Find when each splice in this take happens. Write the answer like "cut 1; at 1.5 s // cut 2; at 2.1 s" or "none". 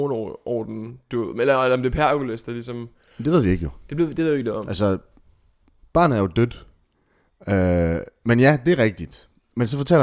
cut 1; at 6.8 s